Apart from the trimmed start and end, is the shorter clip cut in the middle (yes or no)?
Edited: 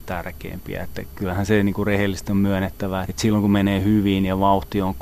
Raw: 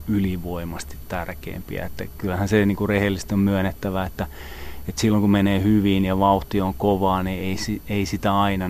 yes